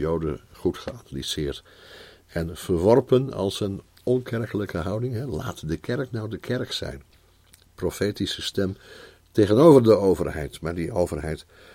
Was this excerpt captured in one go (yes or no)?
yes